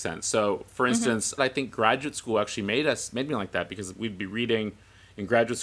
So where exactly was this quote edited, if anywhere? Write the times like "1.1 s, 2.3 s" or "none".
1.4 s